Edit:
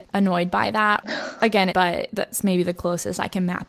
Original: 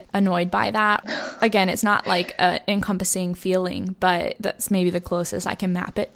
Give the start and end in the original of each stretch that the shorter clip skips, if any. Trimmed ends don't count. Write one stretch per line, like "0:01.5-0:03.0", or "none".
0:01.7-0:04.0